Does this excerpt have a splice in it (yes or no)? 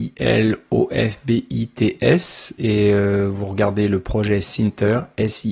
no